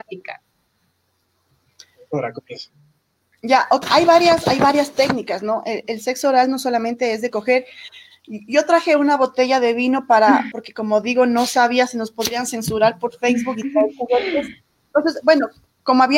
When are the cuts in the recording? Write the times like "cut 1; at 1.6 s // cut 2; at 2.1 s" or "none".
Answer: cut 1; at 3.8 s // cut 2; at 10.5 s